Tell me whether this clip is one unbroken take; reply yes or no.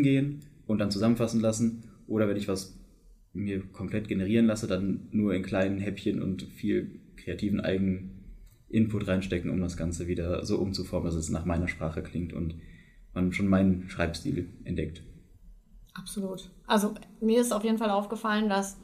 yes